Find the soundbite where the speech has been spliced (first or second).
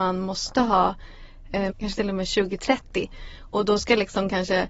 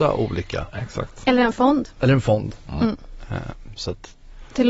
first